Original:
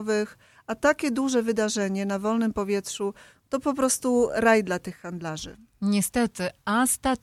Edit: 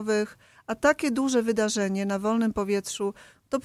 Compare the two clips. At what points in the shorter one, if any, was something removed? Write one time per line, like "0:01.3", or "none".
none